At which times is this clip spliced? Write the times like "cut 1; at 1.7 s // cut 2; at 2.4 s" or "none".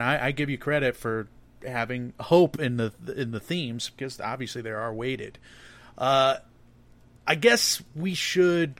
none